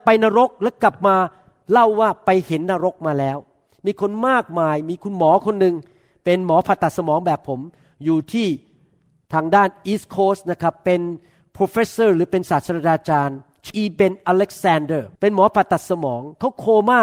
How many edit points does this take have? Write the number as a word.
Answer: two